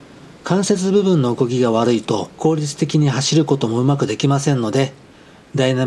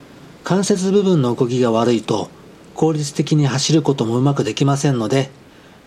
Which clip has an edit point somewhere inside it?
first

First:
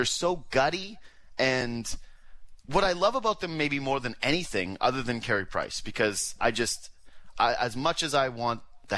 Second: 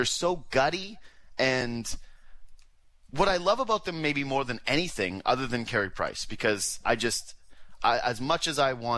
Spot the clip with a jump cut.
first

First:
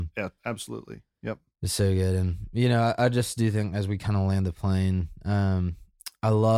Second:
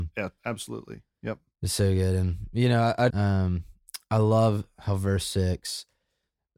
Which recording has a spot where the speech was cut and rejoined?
second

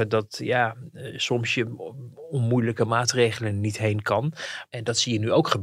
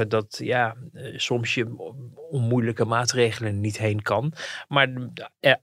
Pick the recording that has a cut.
first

